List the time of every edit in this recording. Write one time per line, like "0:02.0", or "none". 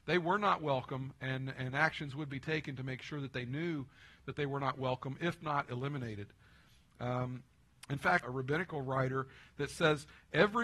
0:08.2